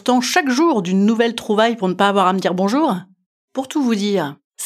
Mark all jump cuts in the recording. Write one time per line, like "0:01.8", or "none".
none